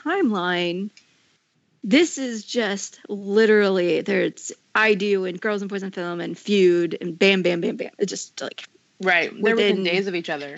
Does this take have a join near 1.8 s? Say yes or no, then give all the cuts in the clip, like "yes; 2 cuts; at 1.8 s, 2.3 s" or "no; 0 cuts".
no; 0 cuts